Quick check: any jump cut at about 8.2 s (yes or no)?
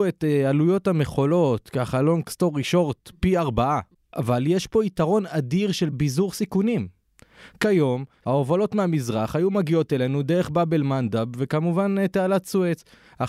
yes